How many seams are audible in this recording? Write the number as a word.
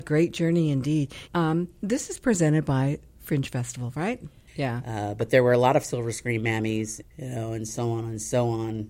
three